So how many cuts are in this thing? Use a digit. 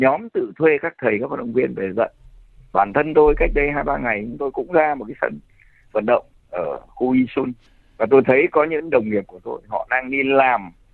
0